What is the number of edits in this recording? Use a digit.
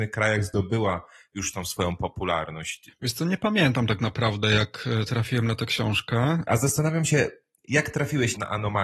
1